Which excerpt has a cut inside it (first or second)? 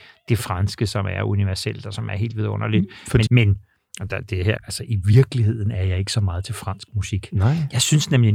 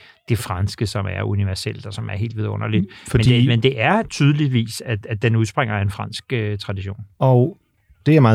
first